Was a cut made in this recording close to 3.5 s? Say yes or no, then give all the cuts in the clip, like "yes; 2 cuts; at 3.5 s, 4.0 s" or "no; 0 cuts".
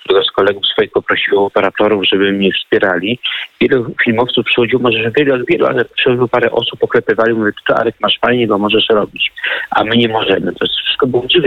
no; 0 cuts